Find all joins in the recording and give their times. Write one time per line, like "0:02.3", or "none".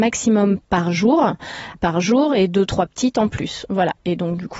0:01.7